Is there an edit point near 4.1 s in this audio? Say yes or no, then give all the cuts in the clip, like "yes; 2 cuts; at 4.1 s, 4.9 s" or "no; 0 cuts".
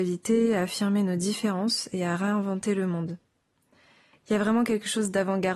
yes; 1 cut; at 4.1 s